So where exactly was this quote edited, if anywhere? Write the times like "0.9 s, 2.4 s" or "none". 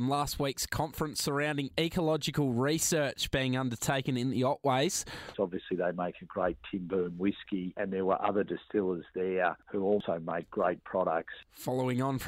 5.3 s